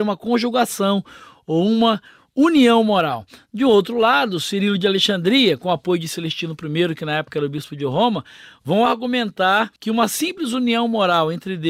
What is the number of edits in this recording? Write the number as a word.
one